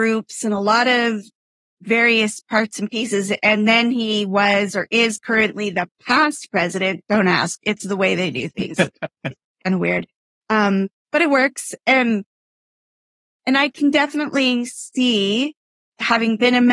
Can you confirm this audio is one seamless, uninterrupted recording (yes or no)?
yes